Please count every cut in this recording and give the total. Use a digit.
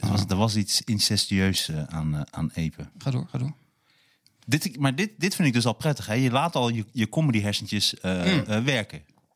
1